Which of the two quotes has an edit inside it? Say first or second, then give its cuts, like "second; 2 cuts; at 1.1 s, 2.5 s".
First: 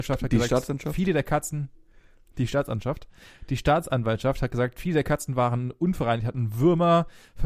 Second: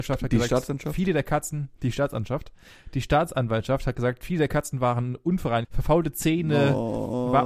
second; 2 cuts; at 1.7 s, 5.6 s